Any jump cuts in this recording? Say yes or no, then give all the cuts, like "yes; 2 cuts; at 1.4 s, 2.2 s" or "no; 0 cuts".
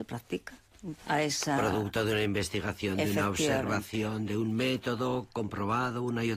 yes; 1 cut; at 1.0 s